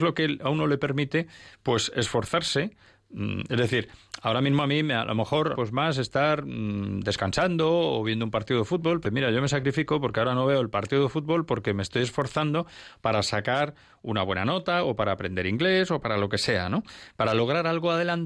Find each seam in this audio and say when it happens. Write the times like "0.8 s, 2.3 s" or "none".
5.5 s, 9.0 s